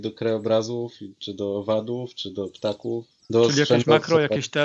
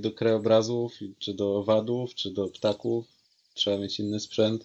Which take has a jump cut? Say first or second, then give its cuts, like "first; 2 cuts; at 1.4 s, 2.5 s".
first; 1 cut; at 3.2 s